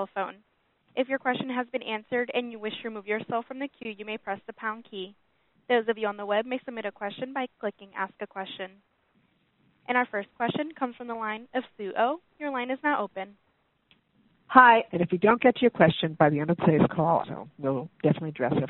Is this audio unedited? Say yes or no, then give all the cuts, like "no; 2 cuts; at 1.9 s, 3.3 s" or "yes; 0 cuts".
no; 2 cuts; at 14.9 s, 17.2 s